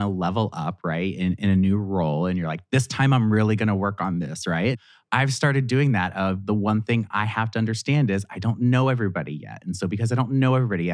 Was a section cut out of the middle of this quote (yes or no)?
no